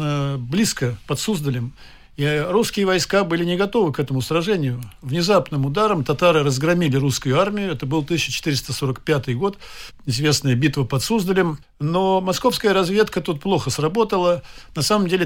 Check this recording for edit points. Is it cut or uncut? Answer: cut